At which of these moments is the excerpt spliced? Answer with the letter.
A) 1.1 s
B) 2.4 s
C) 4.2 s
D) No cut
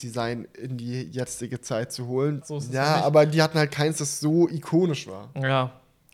B